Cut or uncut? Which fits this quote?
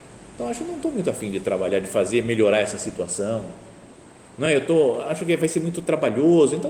uncut